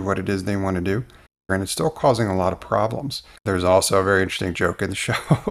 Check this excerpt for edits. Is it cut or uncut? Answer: cut